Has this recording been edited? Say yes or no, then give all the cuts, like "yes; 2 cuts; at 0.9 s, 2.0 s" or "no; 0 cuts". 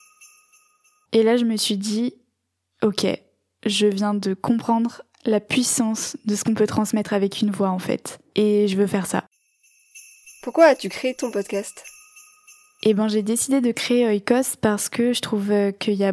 yes; 1 cut; at 1.1 s